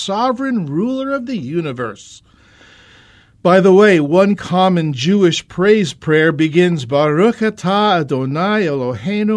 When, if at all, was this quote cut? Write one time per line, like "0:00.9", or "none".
none